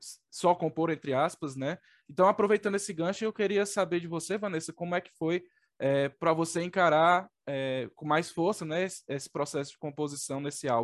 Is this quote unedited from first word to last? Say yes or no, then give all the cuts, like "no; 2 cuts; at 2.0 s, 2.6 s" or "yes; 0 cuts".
yes; 0 cuts